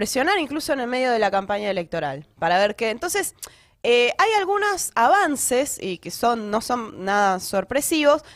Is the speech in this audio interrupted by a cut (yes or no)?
no